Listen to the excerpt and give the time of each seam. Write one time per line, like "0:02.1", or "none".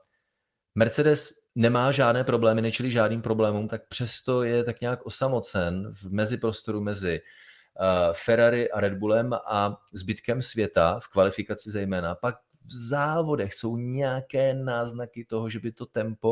0:01.5
0:03.7